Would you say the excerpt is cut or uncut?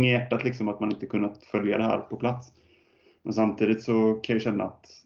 uncut